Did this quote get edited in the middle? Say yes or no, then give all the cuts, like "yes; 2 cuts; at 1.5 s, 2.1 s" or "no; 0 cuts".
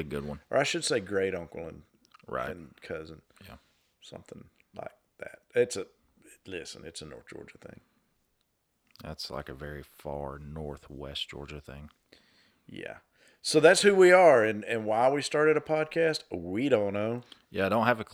no; 0 cuts